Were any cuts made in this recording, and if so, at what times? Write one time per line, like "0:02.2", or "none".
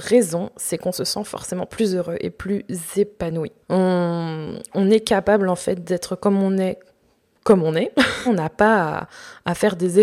0:03.6
0:08.3